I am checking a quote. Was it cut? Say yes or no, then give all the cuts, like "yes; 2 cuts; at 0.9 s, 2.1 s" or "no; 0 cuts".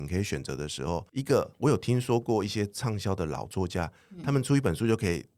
yes; 1 cut; at 1.1 s